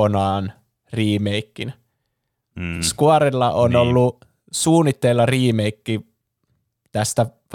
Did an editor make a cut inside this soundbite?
no; 0 cuts

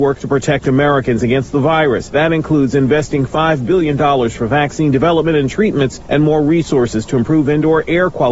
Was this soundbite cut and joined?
yes; 1 cut; at 6.0 s

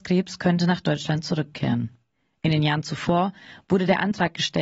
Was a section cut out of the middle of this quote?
no; 0 cuts

